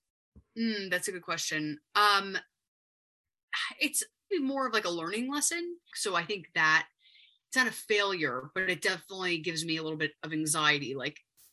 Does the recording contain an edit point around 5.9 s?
yes; 2 cuts; at 4.3 s, 5.9 s

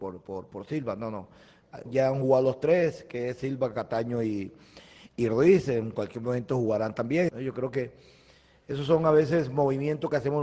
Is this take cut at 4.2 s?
no; 2 cuts; at 1.9 s, 7.3 s

